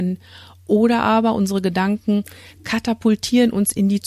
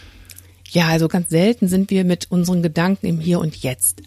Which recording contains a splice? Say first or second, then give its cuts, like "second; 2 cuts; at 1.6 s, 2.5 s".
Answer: second; 1 cut; at 1.1 s